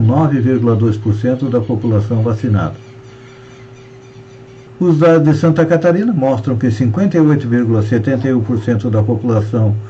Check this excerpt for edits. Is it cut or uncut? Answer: cut